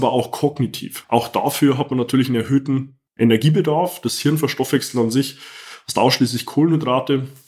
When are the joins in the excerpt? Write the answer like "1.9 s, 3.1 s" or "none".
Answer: 1.0 s, 3.1 s